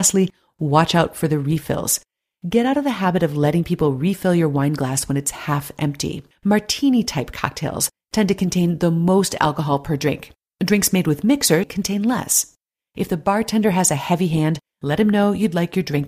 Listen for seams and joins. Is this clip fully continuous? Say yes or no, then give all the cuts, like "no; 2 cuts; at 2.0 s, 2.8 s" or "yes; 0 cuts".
no; 2 cuts; at 6.3 s, 11.6 s